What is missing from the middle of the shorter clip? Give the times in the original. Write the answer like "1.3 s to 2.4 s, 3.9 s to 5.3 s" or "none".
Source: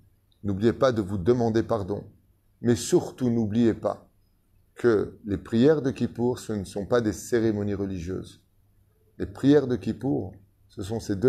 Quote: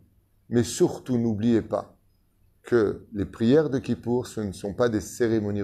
none